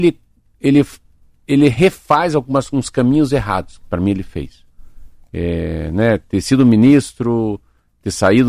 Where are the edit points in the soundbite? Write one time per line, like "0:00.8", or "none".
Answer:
none